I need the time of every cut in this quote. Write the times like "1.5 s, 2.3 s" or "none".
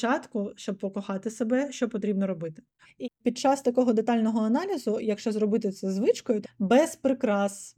2.8 s, 6.4 s

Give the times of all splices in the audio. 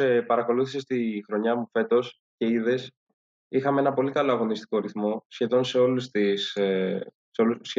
none

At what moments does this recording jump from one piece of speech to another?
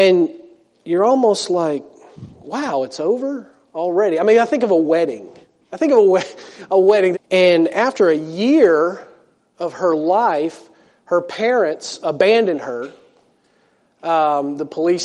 7.1 s

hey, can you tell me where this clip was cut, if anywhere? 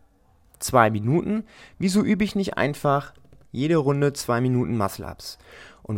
none

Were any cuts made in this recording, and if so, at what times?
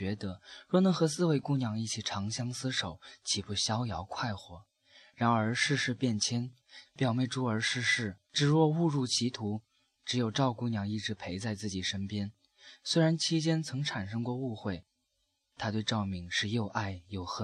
6.8 s, 8.2 s

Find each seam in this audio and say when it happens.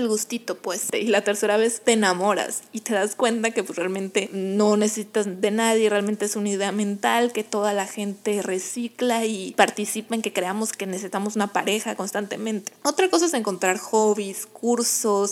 none

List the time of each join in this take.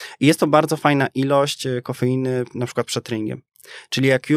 none

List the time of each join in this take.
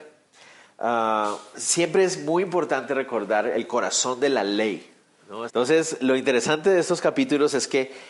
5.5 s

